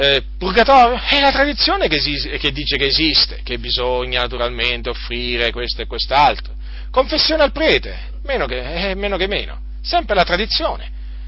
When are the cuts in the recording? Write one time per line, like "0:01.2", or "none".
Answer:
none